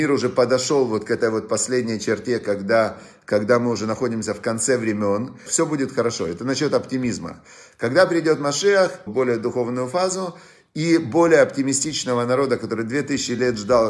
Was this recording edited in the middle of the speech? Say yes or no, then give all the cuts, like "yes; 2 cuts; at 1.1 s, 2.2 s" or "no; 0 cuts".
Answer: yes; 2 cuts; at 5.5 s, 9.1 s